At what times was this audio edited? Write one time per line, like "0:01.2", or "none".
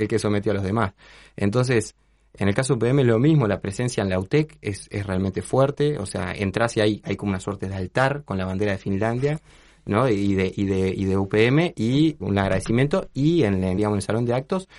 0:12.2
0:13.8